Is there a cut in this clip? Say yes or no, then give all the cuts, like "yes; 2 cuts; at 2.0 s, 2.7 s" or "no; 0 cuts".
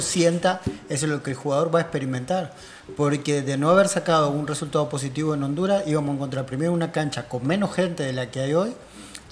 no; 0 cuts